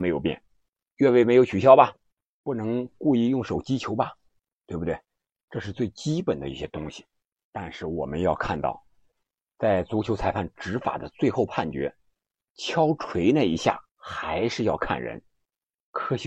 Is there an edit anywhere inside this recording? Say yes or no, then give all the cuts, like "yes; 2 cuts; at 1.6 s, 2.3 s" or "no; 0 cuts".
yes; 2 cuts; at 7.5 s, 13.9 s